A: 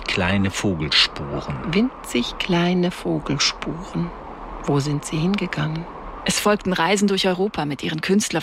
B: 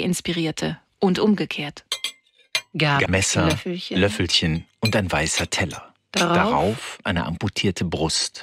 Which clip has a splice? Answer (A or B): B